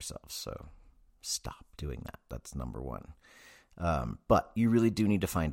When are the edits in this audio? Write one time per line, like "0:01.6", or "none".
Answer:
none